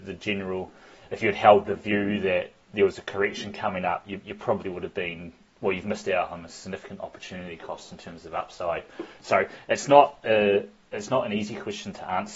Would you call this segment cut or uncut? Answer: uncut